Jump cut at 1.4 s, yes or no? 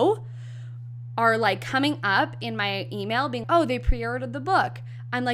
no